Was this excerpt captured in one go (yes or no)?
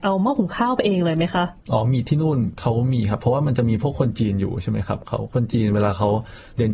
yes